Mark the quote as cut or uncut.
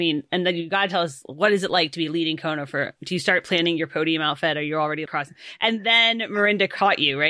cut